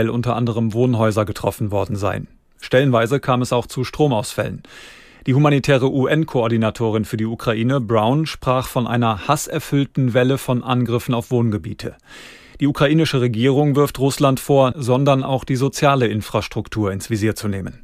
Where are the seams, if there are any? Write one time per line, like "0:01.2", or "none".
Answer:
0:14.7